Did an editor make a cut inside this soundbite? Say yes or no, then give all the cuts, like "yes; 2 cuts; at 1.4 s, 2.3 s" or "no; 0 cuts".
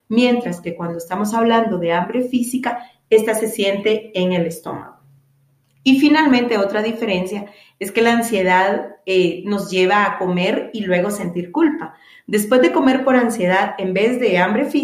no; 0 cuts